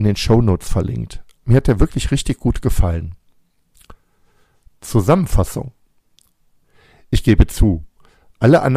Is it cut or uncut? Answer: cut